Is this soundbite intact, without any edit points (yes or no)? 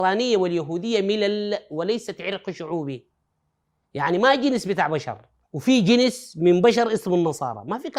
no